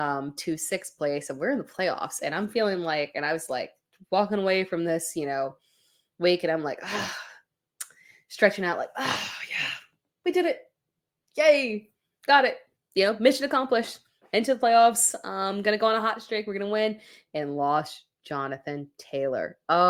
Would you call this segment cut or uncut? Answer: uncut